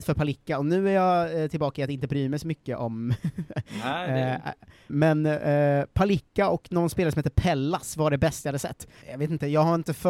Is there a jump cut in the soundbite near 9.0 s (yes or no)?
yes